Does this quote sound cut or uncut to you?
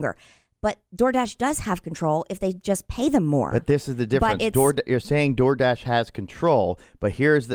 uncut